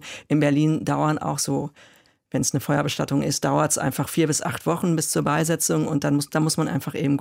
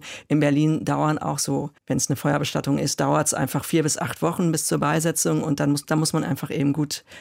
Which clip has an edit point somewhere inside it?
second; 1 cut; at 1.8 s

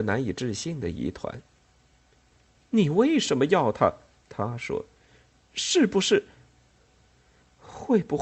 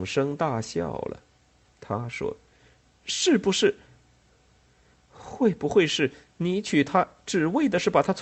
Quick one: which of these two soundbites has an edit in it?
second; 1 cut; at 1.6 s

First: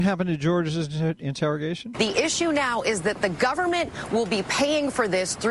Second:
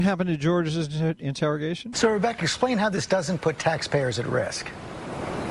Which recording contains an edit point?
second; 1 cut; at 1.9 s

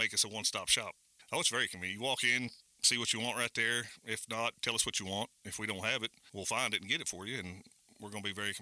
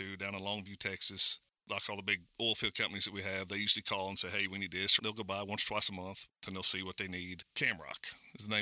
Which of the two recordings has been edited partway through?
second; 2 cuts; at 5.0 s, 7.4 s

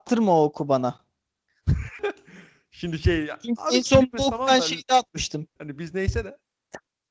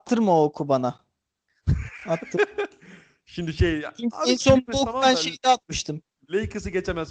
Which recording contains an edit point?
first; 2 cuts; at 2.0 s, 5.6 s

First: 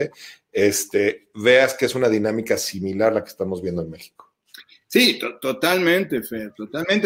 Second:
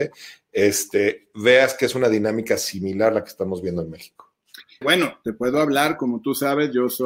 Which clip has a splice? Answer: second; 1 cut; at 4.8 s

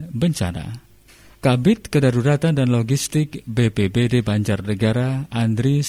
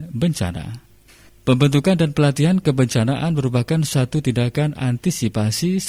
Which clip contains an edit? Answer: second; 1 cut; at 1.3 s

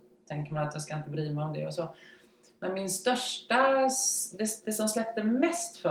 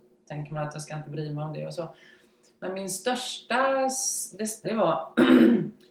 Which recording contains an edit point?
second; 1 cut; at 4.6 s

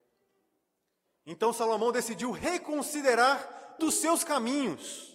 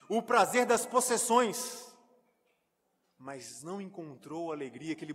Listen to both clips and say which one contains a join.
first; 1 cut; at 3.8 s

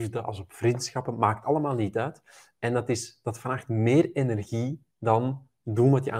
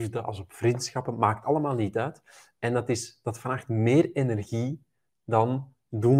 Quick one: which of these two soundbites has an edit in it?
first; 1 cut; at 4.9 s

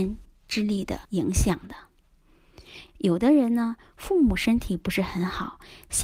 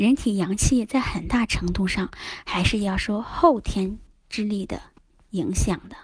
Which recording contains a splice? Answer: first; 2 cuts; at 1.1 s, 2.9 s

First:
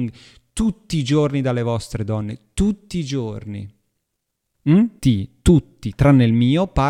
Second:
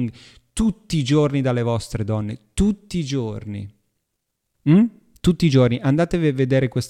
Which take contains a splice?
first; 1 cut; at 5.0 s

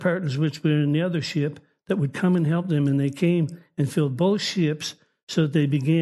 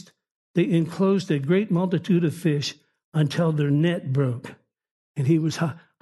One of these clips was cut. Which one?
second; 1 cut; at 5.0 s

